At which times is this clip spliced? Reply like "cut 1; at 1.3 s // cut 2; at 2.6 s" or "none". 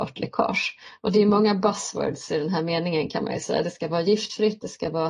none